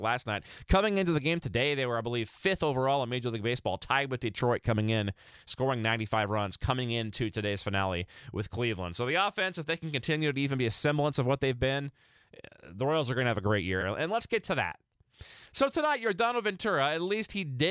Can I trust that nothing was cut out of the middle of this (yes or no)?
no